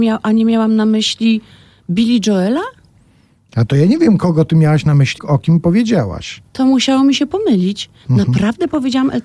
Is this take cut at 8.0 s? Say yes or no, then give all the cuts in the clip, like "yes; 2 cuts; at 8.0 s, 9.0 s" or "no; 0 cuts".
no; 2 cuts; at 5.2 s, 6.5 s